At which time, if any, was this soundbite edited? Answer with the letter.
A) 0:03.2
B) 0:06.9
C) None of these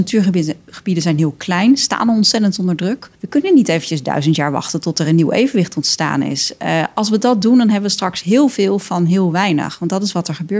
A